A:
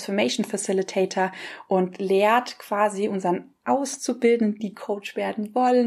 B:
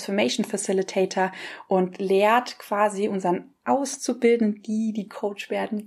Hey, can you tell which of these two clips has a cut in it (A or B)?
A